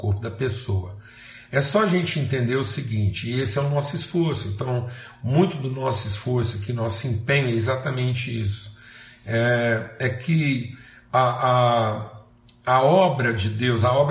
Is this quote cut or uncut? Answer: uncut